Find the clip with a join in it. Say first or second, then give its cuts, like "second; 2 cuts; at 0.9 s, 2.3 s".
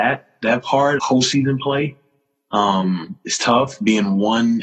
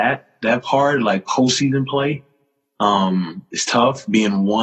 first; 1 cut; at 1.0 s